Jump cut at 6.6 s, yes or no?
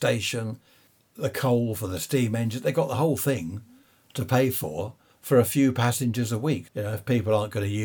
yes